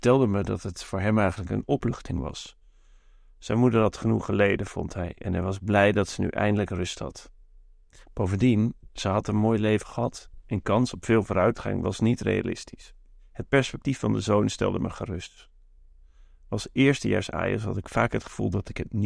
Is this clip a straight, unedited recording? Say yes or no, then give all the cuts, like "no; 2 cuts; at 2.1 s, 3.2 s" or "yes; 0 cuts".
yes; 0 cuts